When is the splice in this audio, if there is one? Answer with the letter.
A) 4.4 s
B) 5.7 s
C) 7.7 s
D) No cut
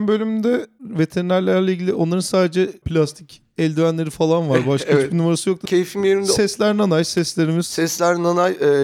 B